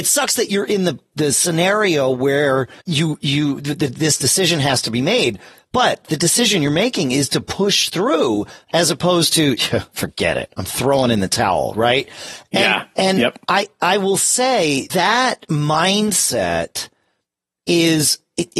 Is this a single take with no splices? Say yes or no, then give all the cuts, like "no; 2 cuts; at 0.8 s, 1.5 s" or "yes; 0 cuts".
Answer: no; 2 cuts; at 2.8 s, 14.9 s